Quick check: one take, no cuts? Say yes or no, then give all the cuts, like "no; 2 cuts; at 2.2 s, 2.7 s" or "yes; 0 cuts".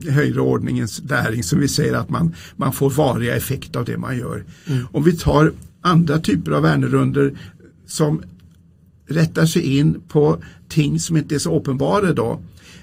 yes; 0 cuts